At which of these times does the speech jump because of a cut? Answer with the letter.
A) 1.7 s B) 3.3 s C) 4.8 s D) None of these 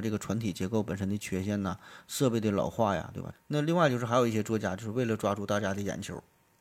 B